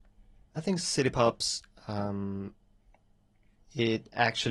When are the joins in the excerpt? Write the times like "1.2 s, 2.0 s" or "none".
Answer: none